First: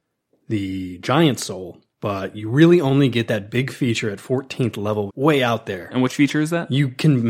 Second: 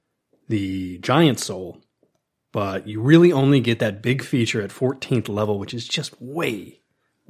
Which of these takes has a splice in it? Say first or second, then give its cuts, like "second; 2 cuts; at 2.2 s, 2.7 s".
first; 2 cuts; at 1.9 s, 5.1 s